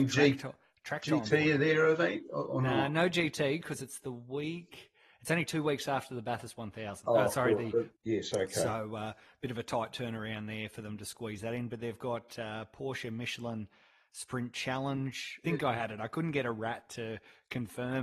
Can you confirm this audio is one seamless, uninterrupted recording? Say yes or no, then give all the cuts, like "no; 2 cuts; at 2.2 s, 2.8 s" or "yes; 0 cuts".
no; 2 cuts; at 7.9 s, 15.4 s